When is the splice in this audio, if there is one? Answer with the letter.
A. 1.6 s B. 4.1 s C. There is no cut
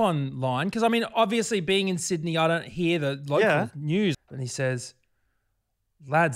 B